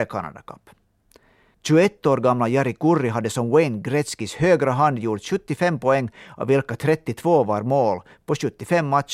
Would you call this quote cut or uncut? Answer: cut